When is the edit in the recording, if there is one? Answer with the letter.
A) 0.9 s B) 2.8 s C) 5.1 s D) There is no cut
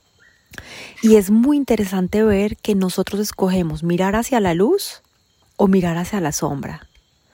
A